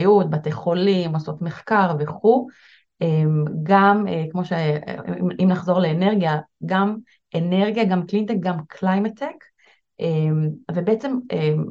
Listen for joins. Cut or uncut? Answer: uncut